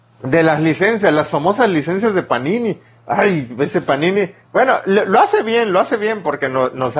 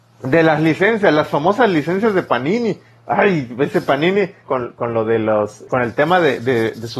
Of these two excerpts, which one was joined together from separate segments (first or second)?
second